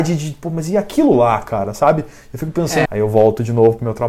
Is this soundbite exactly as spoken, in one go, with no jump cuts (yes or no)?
no